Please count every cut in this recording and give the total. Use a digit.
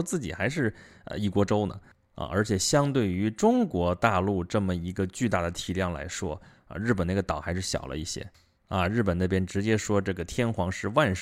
2